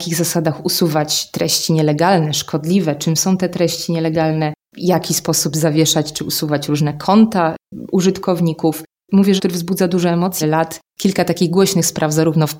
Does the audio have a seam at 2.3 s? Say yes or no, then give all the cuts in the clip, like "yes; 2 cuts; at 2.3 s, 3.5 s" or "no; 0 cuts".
no; 2 cuts; at 9.4 s, 10.4 s